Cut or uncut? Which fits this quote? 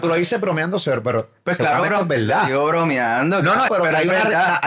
cut